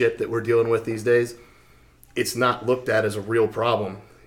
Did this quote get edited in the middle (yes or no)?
no